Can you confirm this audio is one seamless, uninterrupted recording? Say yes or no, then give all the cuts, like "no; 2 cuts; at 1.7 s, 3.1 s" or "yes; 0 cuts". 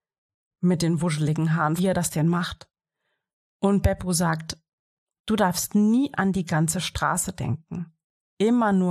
no; 1 cut; at 1.8 s